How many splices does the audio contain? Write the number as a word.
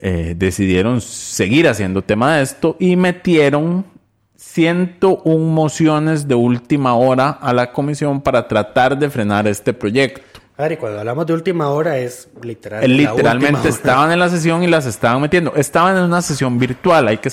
zero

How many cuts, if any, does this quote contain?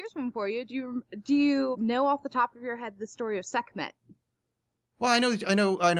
one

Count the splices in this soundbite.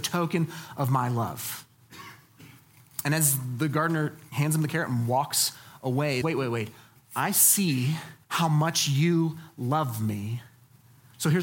two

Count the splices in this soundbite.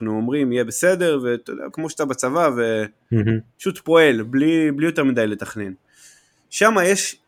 one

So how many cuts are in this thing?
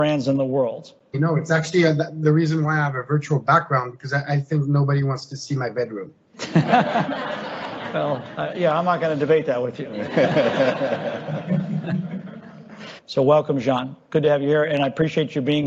two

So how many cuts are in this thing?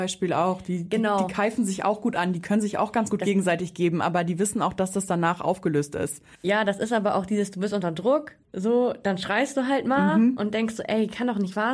one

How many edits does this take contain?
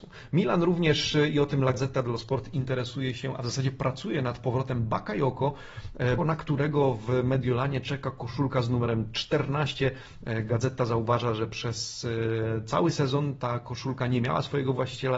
one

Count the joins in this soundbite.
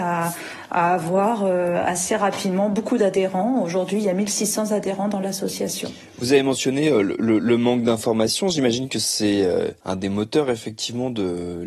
one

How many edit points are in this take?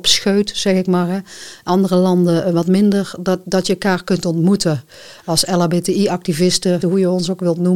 one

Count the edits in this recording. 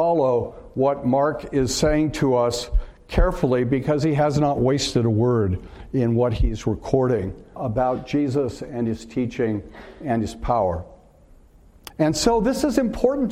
two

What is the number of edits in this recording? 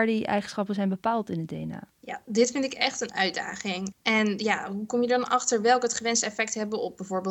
two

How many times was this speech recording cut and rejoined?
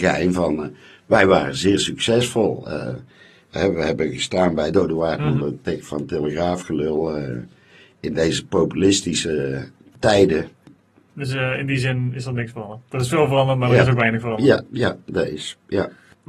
one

